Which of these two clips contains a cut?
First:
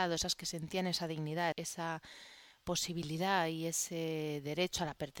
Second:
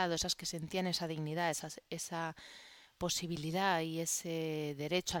first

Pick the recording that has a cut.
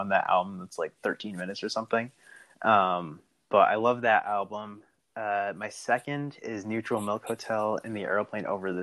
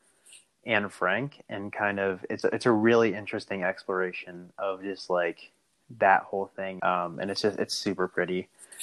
second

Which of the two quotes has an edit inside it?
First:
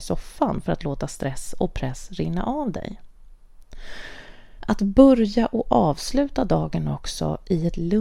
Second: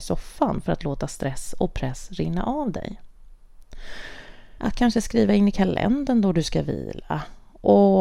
second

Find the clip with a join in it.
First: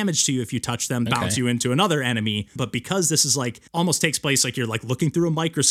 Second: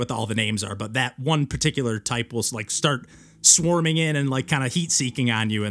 first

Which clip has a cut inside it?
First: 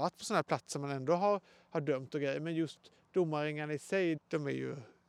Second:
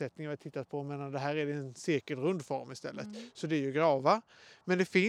first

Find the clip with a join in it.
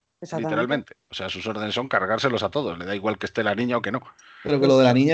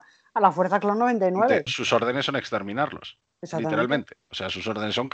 second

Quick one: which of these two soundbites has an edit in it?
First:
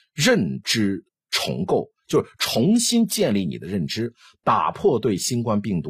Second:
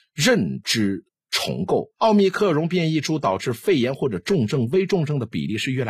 second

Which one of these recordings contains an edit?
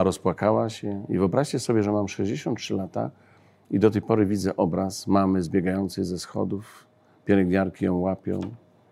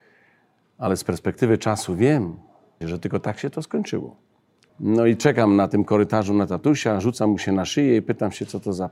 second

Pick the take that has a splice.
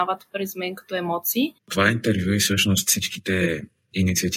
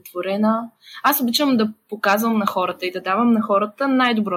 first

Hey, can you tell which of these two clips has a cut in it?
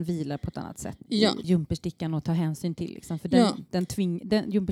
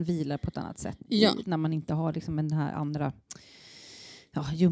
first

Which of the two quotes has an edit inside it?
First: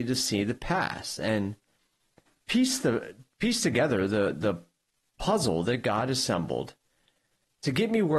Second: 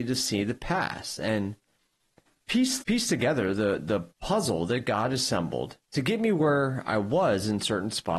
second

